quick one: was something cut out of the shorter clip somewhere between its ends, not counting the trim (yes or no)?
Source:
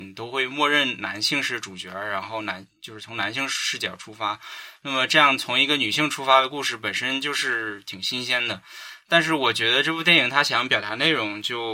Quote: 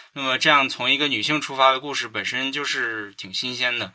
no